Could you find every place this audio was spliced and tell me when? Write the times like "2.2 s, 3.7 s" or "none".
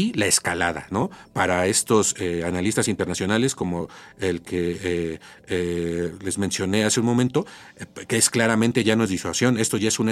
none